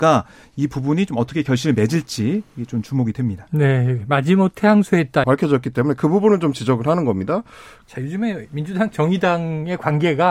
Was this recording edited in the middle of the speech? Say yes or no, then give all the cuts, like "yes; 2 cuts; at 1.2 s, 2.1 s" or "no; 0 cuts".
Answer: yes; 2 cuts; at 5.2 s, 7.8 s